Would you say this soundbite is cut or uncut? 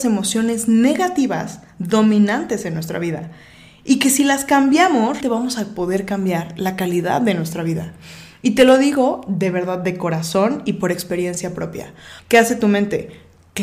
cut